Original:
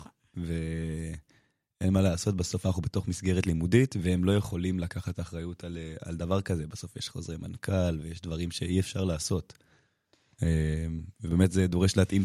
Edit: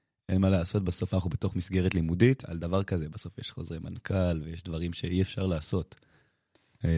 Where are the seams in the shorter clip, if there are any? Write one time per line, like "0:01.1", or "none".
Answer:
0:02.4